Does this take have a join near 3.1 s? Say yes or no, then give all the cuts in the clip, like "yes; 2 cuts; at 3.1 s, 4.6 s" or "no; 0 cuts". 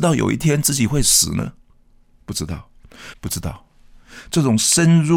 yes; 1 cut; at 3.1 s